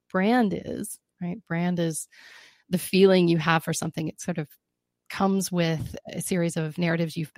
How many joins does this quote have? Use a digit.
0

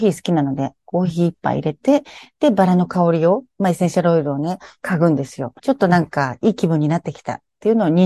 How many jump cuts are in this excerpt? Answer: 1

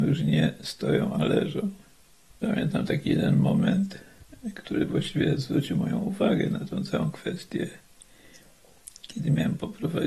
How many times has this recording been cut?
1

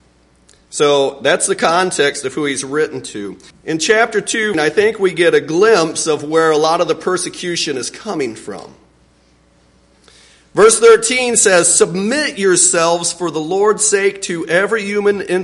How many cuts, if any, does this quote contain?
2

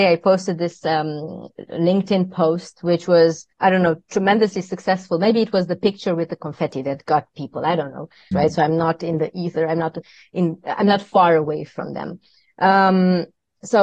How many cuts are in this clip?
2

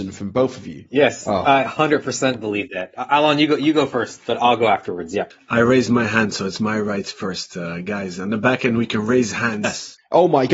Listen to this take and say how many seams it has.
1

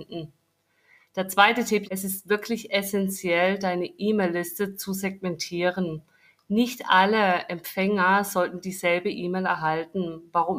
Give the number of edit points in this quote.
1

